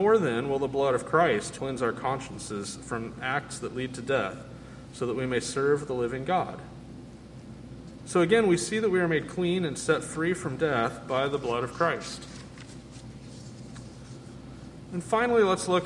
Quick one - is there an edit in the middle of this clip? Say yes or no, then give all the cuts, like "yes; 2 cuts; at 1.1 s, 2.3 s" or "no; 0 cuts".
yes; 1 cut; at 1.6 s